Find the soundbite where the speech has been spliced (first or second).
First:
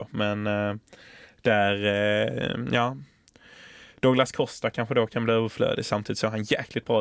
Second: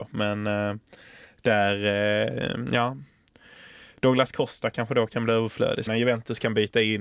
second